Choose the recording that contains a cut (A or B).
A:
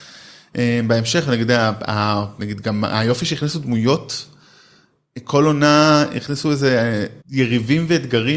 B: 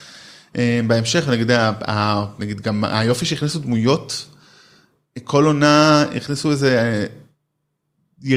A